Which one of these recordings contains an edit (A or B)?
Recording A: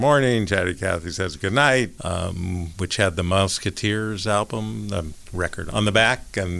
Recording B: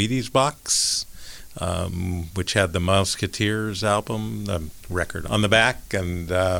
A